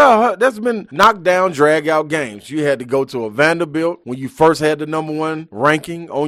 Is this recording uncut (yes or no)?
yes